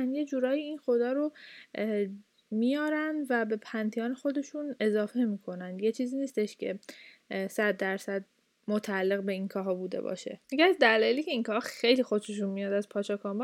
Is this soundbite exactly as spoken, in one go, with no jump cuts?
no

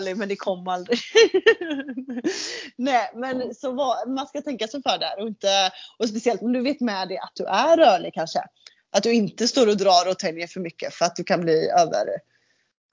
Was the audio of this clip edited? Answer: no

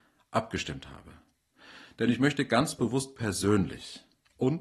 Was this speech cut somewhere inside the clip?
no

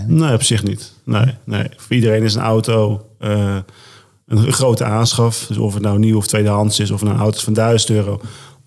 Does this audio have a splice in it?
no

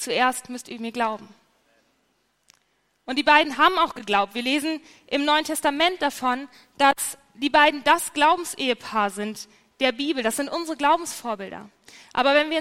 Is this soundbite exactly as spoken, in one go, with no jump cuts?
yes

